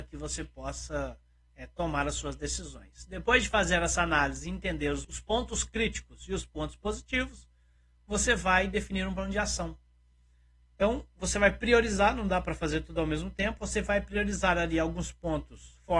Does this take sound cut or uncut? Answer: cut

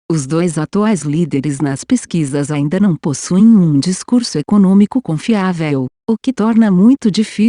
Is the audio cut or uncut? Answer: uncut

